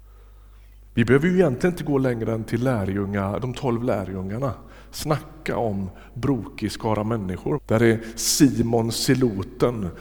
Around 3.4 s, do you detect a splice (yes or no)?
yes